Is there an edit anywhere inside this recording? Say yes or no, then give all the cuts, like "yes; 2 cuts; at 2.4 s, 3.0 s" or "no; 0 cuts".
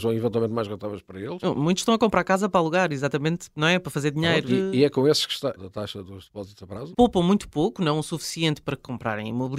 yes; 3 cuts; at 4.5 s, 5.6 s, 6.9 s